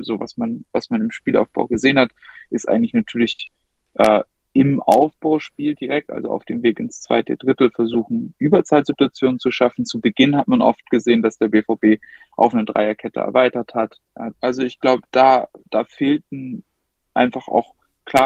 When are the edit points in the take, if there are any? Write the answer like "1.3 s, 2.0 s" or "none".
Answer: 14.3 s